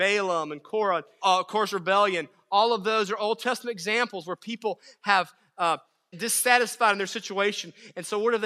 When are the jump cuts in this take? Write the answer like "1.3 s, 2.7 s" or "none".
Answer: 1.2 s, 6.1 s